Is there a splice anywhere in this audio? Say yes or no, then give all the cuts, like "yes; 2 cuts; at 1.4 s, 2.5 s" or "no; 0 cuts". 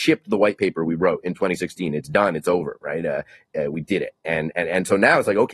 no; 0 cuts